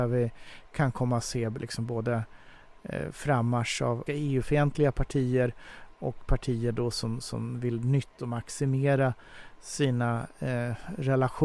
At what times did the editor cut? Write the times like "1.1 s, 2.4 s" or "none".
4.1 s